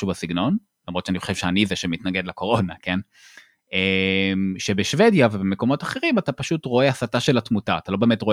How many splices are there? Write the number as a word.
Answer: zero